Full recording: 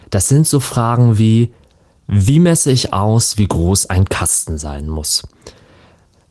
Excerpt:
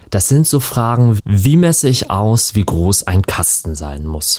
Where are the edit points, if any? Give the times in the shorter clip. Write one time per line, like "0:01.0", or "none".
0:01.2